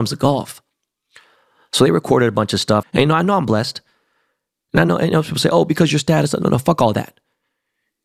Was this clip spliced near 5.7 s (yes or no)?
no